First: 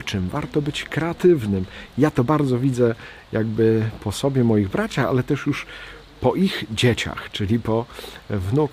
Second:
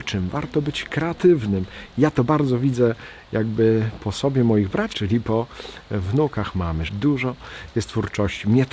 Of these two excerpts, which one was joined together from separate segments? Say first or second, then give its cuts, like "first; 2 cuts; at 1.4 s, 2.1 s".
second; 2 cuts; at 4.9 s, 6.9 s